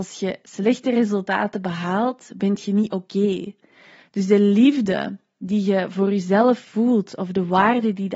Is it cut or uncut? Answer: uncut